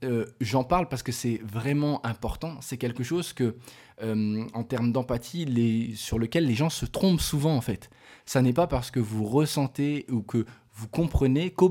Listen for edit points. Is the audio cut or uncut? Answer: uncut